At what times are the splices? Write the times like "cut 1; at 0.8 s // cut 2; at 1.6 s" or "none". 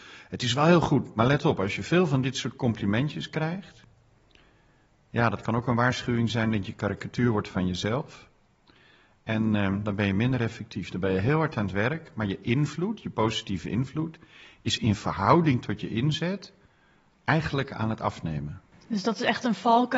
none